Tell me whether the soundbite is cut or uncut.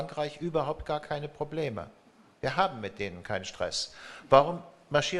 uncut